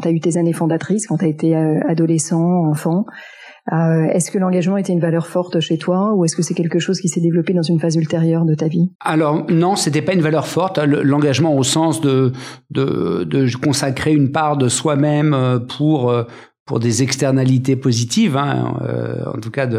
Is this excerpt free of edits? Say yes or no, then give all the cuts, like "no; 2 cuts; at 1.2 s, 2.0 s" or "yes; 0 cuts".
no; 1 cut; at 8.9 s